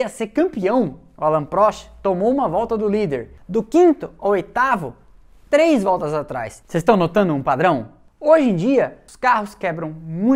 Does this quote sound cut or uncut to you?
cut